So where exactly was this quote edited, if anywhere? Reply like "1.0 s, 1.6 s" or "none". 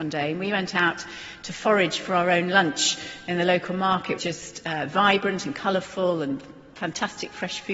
4.2 s